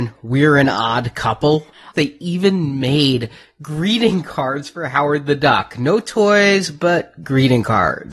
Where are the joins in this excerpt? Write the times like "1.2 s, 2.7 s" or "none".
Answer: 1.9 s